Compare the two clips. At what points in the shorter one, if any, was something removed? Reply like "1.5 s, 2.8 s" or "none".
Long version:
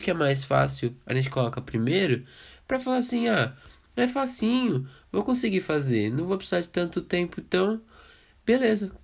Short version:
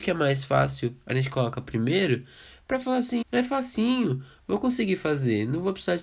3.2 s

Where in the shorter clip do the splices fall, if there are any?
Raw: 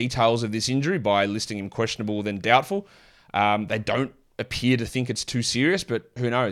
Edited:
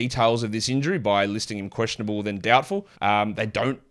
2.9 s

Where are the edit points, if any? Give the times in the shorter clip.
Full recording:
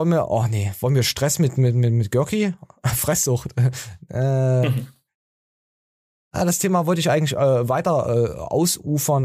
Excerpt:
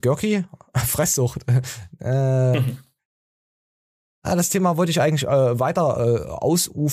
none

